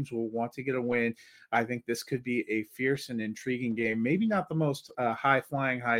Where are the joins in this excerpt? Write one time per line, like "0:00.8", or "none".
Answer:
none